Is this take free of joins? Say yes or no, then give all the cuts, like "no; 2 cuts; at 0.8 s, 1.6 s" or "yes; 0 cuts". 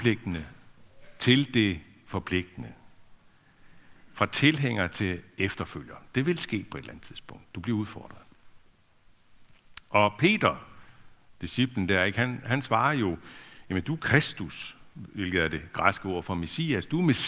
yes; 0 cuts